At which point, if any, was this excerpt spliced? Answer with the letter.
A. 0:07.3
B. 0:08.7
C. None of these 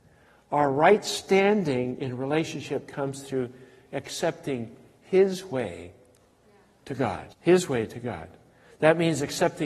A